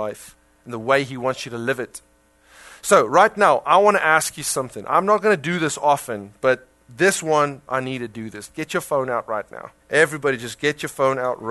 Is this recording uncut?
no; 2 cuts; at 7.7 s, 9.8 s

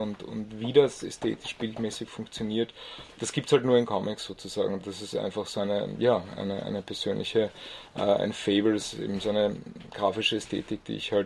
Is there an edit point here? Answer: no; 0 cuts

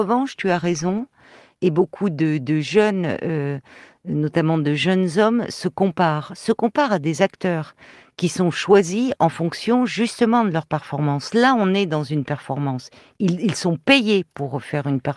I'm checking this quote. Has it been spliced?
no; 0 cuts

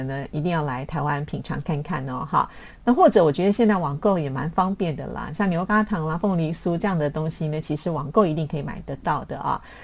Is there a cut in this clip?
no; 0 cuts

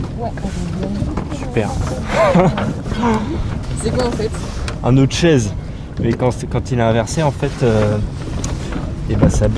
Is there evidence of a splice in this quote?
no; 0 cuts

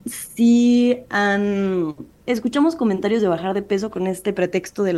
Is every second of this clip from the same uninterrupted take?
no; 1 cut; at 2.2 s

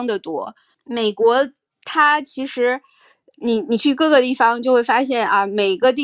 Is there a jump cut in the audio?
no; 0 cuts

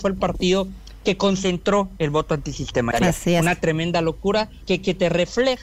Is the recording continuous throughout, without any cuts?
no; 2 cuts; at 2.9 s, 4.6 s

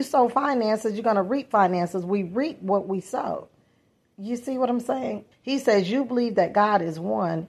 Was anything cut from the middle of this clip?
yes; 1 cut; at 5.3 s

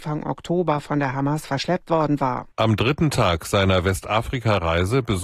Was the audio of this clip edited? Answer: yes; 1 cut; at 2.5 s

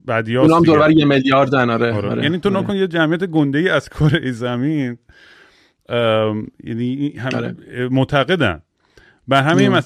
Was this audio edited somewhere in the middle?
no; 0 cuts

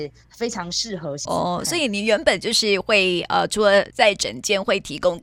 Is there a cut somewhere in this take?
yes; 1 cut; at 1.3 s

